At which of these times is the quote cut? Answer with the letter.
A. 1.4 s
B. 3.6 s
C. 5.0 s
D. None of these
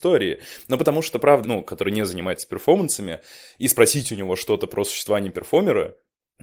A